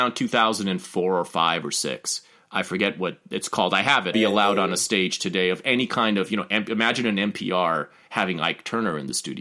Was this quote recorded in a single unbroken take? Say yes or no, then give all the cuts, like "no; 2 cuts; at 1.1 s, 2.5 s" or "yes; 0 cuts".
no; 1 cut; at 4.1 s